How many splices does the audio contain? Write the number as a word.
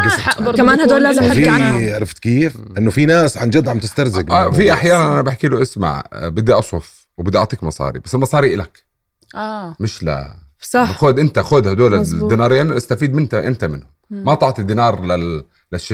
zero